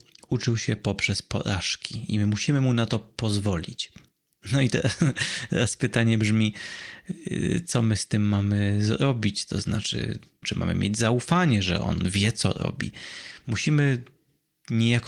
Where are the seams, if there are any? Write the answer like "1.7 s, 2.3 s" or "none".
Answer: 10.4 s, 13.4 s

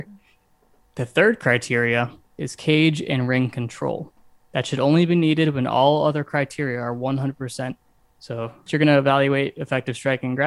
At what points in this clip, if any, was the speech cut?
8.7 s

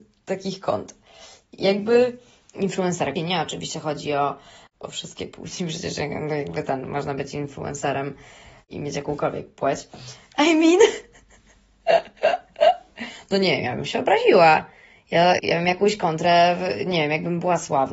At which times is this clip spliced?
3.2 s, 10.4 s, 15.4 s

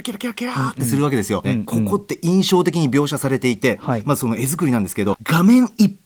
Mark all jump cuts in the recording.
1.4 s, 5.1 s

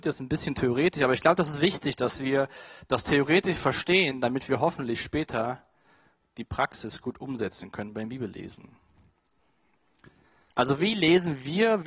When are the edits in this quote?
10.5 s

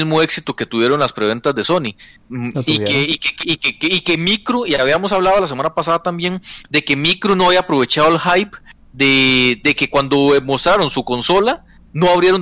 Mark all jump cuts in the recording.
none

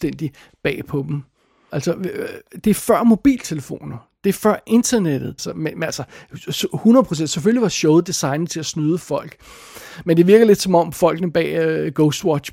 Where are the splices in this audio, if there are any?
1.7 s, 5.4 s

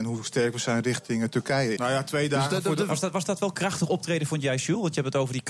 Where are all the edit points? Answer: 1.8 s, 2.9 s

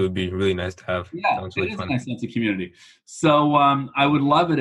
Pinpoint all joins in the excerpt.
none

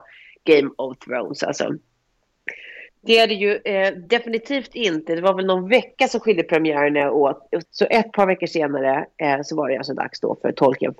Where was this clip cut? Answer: 2.9 s, 7.7 s

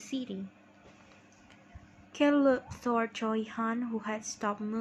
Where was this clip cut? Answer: 2.1 s

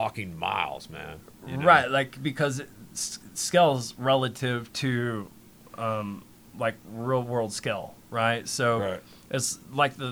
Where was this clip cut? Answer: none

